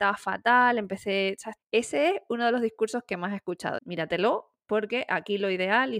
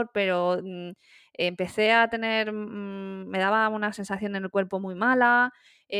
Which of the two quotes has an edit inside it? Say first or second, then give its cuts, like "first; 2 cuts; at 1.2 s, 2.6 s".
first; 2 cuts; at 1.6 s, 3.8 s